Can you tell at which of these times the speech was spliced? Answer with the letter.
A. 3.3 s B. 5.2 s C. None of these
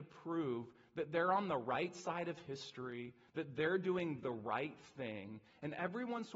C